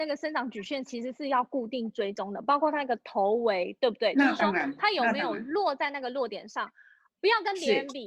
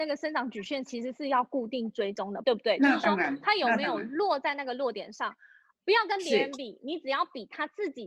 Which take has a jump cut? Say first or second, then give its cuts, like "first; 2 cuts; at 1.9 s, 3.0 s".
second; 1 cut; at 2.4 s